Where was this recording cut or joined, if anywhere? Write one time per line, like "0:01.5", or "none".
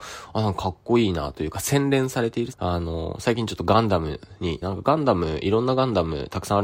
0:02.5
0:04.6